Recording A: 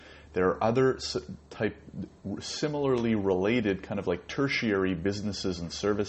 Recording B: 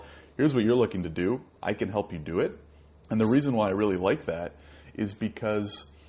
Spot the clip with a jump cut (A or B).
B